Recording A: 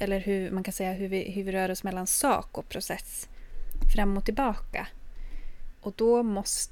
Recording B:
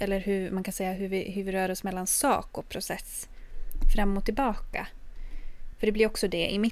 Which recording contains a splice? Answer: A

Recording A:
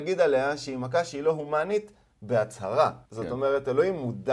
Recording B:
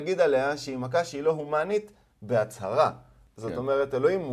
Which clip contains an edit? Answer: A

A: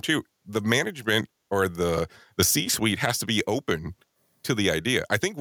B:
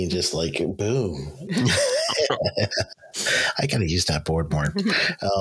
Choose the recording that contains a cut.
B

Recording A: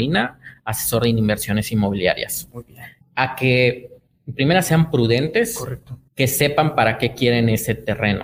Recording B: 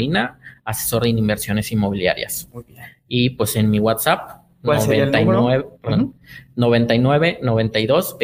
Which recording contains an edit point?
A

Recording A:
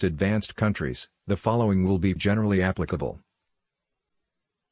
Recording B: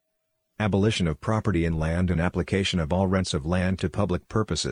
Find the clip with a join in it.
A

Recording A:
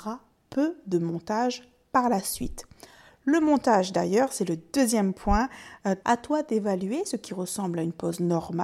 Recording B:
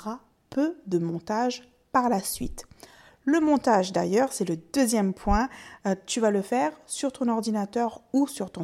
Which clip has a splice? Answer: A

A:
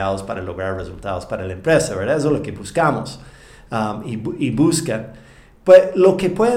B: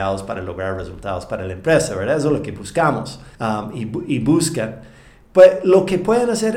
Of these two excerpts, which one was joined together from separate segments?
B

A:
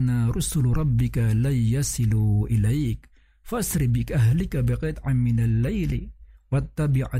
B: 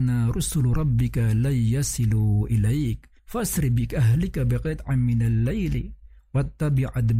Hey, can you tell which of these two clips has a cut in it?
B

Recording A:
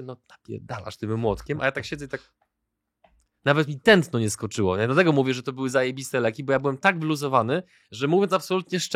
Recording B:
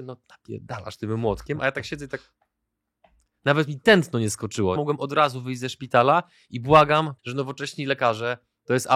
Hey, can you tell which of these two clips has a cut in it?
B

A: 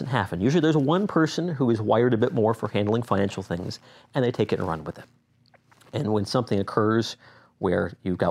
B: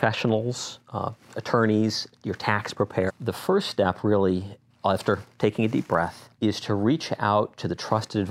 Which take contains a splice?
B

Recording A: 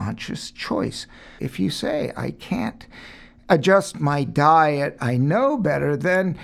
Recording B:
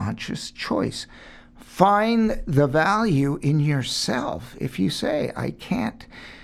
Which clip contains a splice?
A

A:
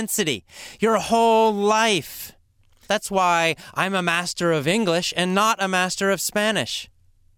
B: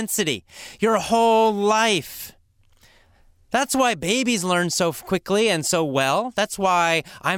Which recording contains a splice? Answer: A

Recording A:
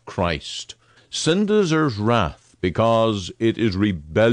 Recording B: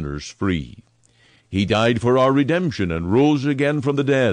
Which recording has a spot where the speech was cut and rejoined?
A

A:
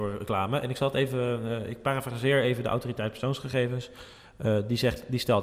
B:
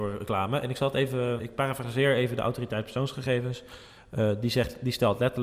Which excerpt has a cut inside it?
B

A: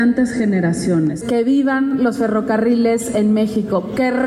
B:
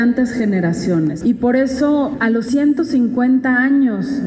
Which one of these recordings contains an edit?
B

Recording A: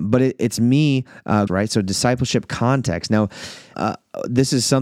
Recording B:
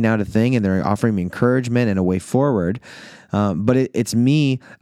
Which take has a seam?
A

